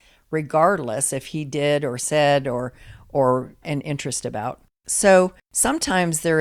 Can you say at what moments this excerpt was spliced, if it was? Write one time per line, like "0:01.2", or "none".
0:03.6